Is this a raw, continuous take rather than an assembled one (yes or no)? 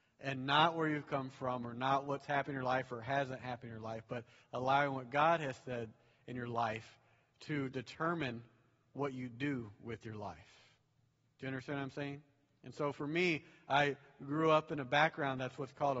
yes